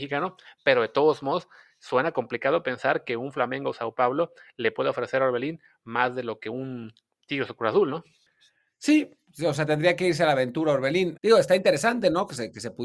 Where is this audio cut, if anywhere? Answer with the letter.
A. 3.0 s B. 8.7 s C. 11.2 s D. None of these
C